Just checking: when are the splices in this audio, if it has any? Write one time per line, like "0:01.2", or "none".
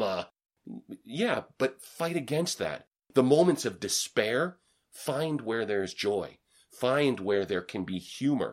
none